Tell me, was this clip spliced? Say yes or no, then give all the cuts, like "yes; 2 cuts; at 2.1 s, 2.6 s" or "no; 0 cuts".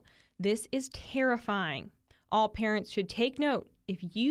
yes; 1 cut; at 2.1 s